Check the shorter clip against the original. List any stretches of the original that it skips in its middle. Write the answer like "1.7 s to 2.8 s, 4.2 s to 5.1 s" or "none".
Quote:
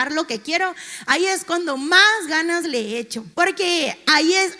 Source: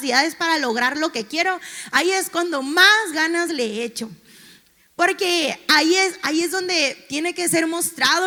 4.2 s to 4.9 s